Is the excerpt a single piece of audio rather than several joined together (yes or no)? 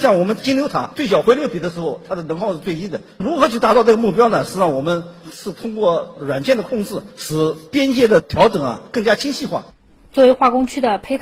yes